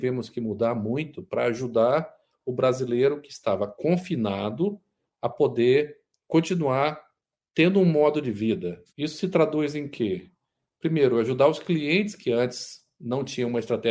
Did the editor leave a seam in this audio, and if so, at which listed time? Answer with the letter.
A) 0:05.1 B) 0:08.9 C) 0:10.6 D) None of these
B